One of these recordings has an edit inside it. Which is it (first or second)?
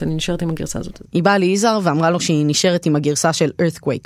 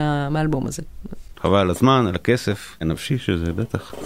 second